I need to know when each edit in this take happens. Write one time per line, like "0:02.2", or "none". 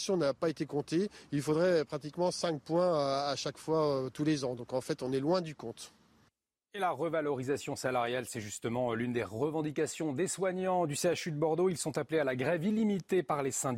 none